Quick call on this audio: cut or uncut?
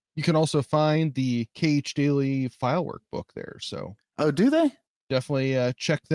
cut